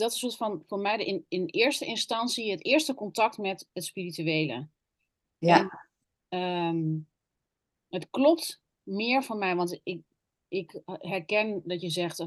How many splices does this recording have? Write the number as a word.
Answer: zero